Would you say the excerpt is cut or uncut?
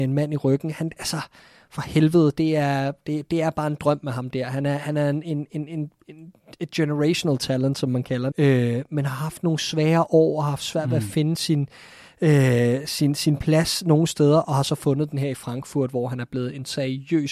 cut